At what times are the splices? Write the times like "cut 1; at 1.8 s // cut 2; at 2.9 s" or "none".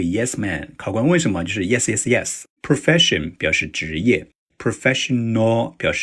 cut 1; at 2.6 s